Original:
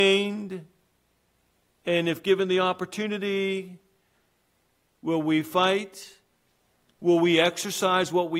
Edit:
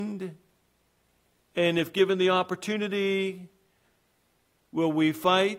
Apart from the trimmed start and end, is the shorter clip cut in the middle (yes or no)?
no